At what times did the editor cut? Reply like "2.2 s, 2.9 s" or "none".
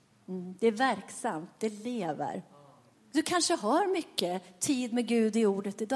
2.9 s